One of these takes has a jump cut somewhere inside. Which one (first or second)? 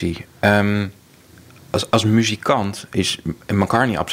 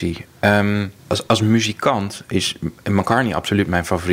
second